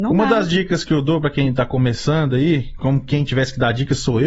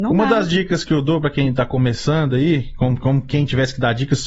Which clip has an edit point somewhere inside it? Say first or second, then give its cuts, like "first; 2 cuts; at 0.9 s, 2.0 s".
first; 1 cut; at 2.8 s